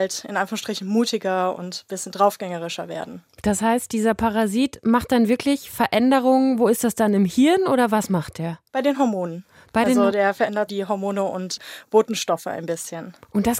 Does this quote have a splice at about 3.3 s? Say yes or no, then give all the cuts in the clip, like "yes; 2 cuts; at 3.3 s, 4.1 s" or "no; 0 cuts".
no; 2 cuts; at 8.7 s, 10.7 s